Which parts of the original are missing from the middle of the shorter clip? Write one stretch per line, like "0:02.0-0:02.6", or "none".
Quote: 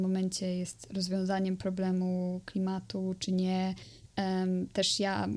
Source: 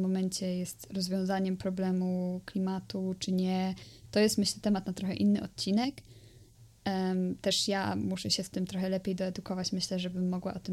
0:04.1-0:06.7

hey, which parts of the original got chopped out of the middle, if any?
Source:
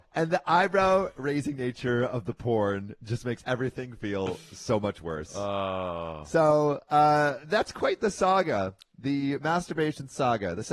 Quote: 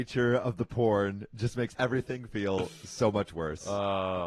none

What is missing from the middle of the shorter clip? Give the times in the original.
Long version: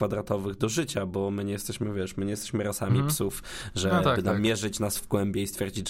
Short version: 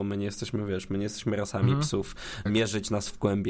0:03.7-0:04.3

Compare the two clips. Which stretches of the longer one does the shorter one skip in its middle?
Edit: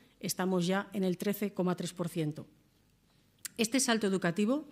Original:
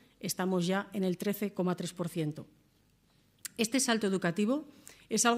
none

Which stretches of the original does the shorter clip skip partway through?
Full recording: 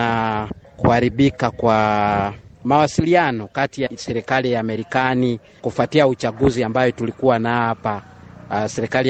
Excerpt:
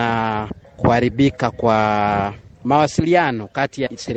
none

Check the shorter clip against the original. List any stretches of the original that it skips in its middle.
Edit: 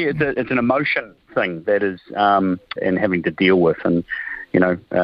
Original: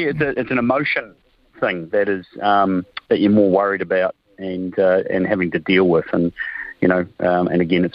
0:01.2-0:01.5
0:03.0-0:05.0

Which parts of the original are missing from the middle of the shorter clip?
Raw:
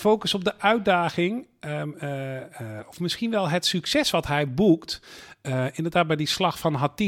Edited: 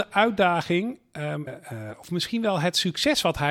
0:01.9-0:02.4

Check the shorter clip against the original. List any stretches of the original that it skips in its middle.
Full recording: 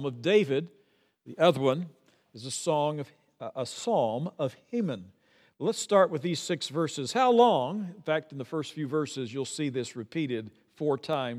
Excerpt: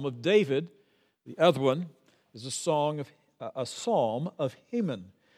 none

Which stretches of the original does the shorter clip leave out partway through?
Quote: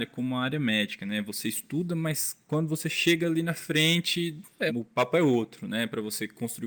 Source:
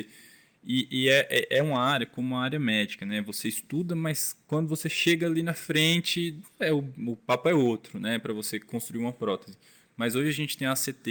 0:06.7-0:07.0

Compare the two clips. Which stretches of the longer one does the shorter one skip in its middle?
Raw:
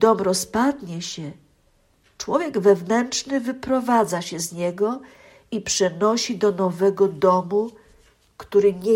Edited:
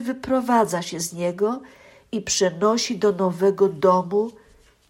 none

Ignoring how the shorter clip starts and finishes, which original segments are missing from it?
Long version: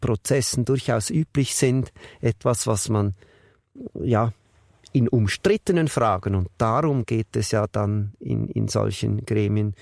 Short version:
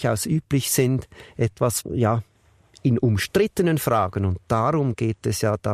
0:02.6-0:03.9

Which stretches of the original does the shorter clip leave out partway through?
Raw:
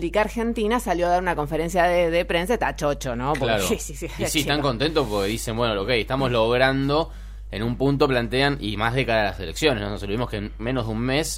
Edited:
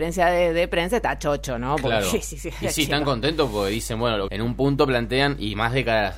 0:05.8-0:07.5

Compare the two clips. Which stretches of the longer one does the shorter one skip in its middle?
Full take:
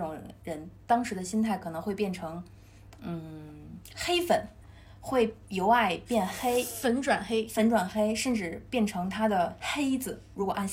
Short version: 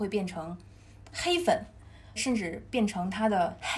0:03.0-0:03.9
0:05.0-0:08.1

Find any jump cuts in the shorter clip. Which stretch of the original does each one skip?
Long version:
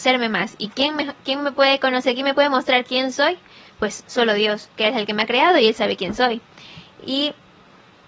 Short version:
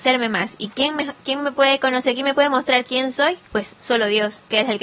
0:03.5-0:03.7

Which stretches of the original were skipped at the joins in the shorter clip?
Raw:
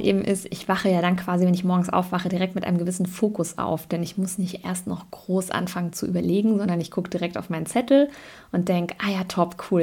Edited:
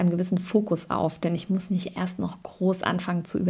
none

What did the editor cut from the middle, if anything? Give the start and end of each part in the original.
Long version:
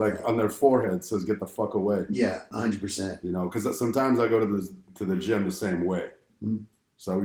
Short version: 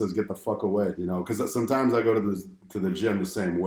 0:02.1-0:03.2

